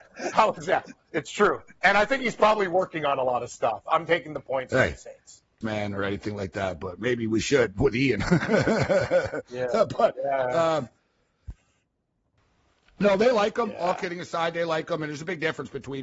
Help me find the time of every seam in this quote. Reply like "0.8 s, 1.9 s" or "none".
5.6 s